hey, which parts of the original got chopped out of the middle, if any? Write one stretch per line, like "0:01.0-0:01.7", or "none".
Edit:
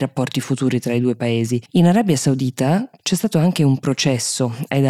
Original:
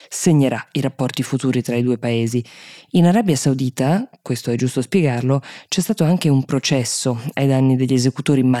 0:02.5-0:02.8
0:04.2-0:05.6